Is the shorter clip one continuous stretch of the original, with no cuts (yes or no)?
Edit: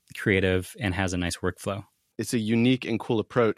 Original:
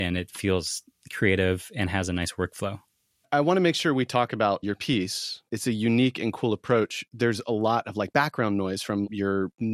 no